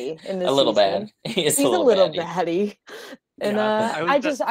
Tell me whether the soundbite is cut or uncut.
uncut